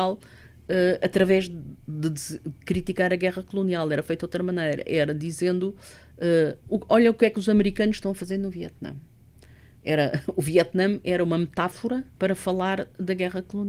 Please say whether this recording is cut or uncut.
cut